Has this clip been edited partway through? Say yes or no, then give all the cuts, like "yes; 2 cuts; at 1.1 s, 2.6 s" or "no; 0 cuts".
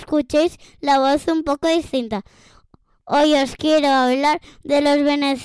no; 0 cuts